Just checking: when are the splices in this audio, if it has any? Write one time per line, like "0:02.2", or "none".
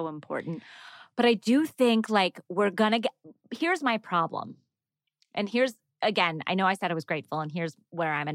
none